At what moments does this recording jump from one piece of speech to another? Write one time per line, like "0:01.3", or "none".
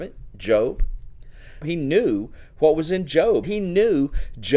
0:01.6
0:03.4